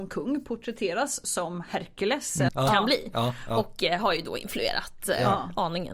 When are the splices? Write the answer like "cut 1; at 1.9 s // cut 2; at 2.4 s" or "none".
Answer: cut 1; at 2.5 s